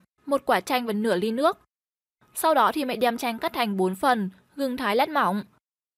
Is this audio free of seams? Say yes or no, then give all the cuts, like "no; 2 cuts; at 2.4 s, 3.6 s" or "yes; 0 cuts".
yes; 0 cuts